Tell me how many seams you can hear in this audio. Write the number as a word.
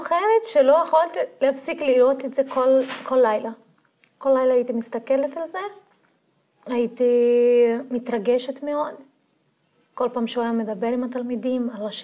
zero